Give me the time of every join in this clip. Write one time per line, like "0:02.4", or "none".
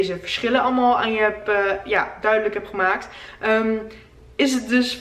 none